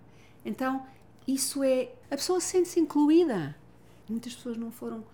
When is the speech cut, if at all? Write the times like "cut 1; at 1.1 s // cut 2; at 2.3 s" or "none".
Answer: cut 1; at 2.0 s // cut 2; at 4.0 s

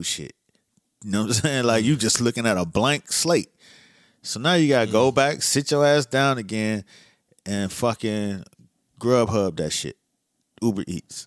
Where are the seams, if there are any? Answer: none

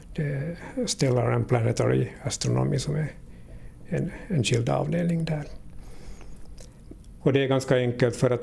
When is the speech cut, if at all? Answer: cut 1; at 7.2 s

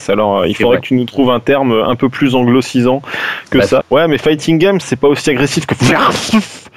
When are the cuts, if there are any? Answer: cut 1; at 3.8 s // cut 2; at 4.8 s

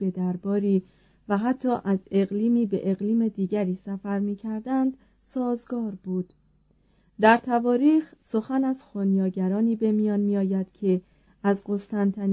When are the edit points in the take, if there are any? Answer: none

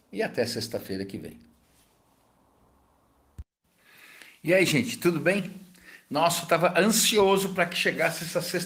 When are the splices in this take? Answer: none

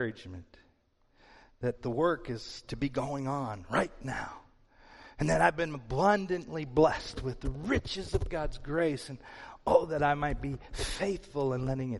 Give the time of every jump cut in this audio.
none

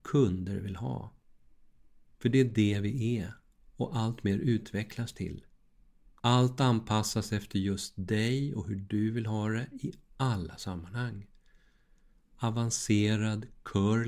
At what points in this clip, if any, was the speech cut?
cut 1; at 6.2 s

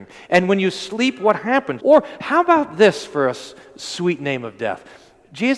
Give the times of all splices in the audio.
cut 1; at 1.8 s

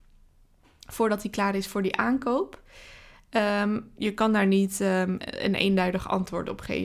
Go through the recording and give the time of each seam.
cut 1; at 4.0 s

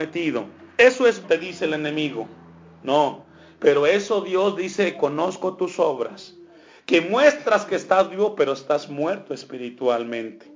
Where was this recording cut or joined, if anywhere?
cut 1; at 1.2 s

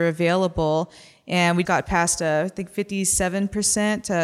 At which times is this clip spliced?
cut 1; at 1.7 s

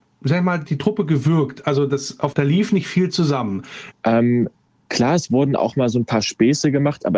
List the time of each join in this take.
cut 1; at 2.3 s // cut 2; at 3.9 s

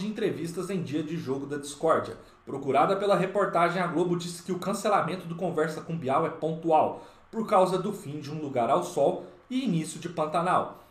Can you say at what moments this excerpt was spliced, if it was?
cut 1; at 2.3 s

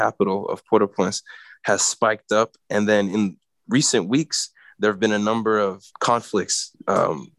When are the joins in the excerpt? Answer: cut 1; at 2.6 s // cut 2; at 5.9 s

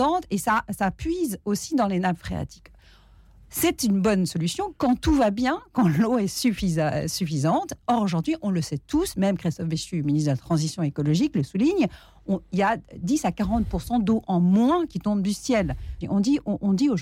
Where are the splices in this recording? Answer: cut 1; at 16.0 s

